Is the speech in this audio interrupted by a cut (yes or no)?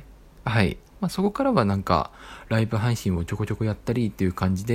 yes